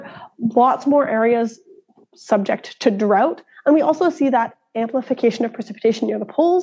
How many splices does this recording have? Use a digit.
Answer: 0